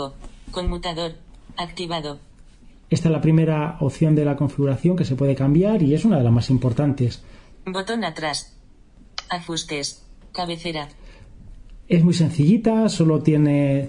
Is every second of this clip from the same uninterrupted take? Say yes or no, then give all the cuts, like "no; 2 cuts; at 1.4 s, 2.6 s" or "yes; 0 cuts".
no; 1 cut; at 7.5 s